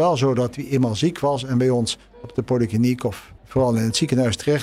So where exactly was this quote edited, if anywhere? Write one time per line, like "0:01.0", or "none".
0:03.4